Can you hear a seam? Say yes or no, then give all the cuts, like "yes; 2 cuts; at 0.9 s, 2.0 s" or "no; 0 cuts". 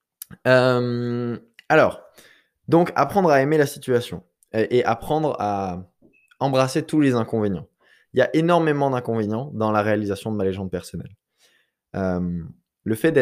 no; 0 cuts